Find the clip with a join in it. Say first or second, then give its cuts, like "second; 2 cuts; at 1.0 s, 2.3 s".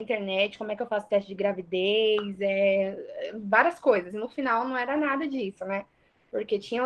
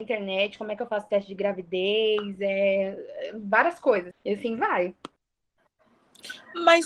second; 1 cut; at 4.1 s